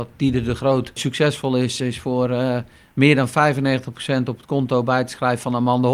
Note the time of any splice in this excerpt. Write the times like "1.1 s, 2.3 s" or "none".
none